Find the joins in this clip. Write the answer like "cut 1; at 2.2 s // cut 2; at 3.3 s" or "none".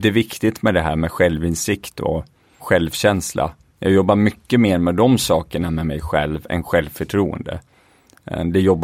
cut 1; at 2.6 s

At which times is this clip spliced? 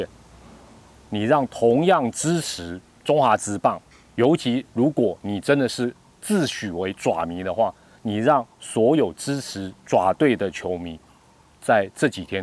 cut 1; at 0.9 s

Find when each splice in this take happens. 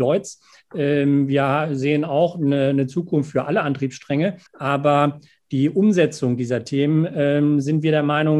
cut 1; at 4.5 s

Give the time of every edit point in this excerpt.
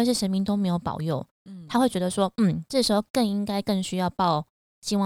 none

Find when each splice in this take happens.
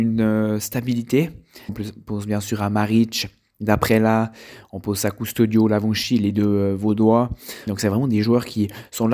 cut 1; at 1.7 s // cut 2; at 7.7 s

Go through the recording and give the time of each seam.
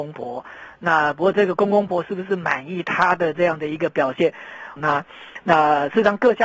cut 1; at 1.9 s // cut 2; at 4.8 s

